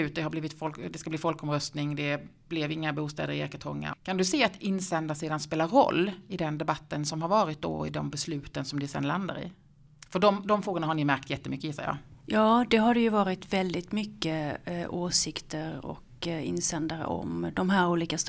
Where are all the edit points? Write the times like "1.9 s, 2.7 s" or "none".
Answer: none